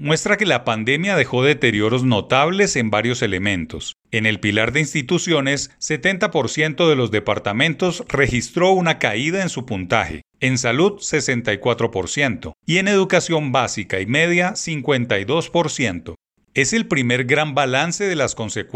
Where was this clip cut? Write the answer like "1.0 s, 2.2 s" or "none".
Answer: 12.6 s